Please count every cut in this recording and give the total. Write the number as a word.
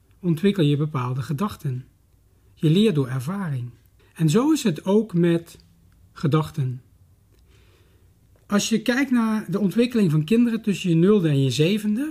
one